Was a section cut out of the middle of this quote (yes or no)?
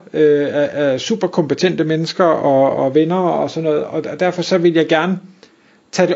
no